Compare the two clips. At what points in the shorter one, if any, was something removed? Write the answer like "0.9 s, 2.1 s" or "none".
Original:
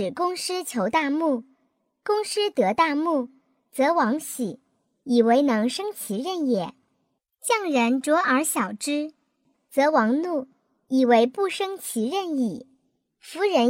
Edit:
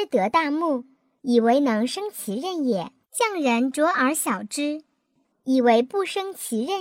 1.2 s, 3.0 s, 5.3 s

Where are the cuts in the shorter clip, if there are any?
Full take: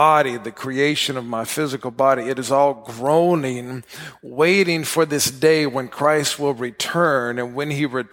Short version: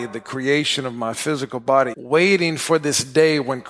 1.9 s

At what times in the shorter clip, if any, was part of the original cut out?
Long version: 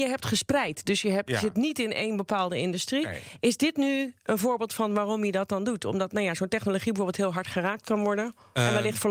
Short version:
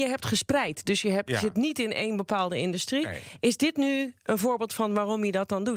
none

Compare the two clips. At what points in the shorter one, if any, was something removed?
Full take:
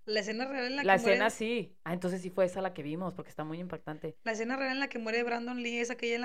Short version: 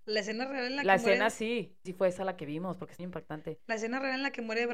1.9 s, 3.0 s

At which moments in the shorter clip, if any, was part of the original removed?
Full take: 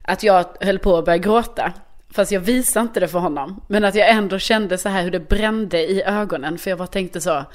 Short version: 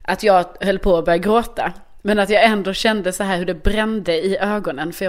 2.0 s

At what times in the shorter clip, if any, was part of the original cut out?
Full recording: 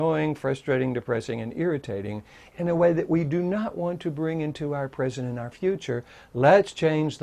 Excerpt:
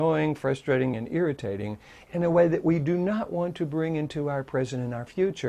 0.9 s

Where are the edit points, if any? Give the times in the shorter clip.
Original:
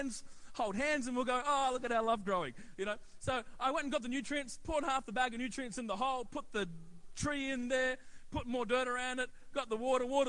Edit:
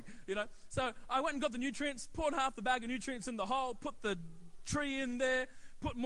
none

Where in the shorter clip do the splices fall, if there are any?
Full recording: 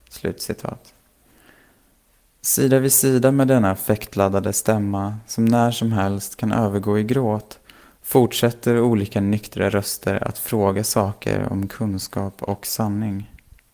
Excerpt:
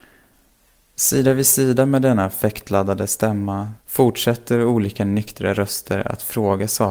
3.8 s

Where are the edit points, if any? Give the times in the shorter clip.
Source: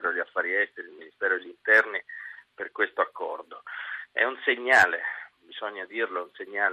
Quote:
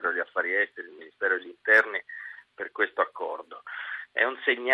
none

